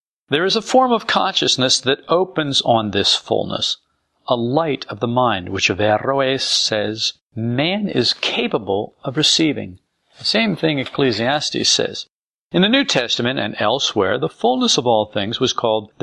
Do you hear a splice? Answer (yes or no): no